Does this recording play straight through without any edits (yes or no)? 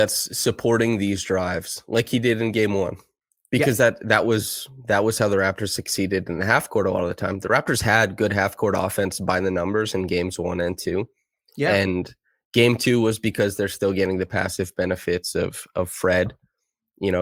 yes